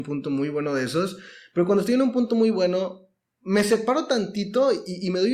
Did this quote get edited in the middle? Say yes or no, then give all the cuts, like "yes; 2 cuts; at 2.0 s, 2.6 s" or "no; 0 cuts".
no; 0 cuts